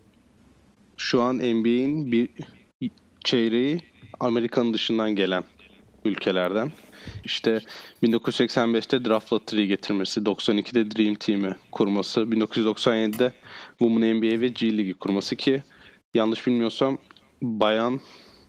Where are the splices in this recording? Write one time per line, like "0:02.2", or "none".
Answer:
0:07.2

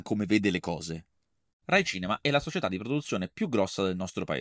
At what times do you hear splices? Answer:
0:01.5

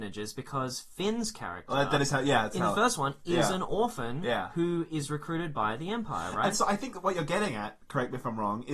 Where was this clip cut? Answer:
none

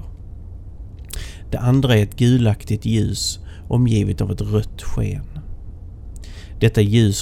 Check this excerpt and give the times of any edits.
none

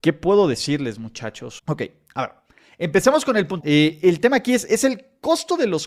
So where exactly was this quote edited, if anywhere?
0:01.6
0:03.6

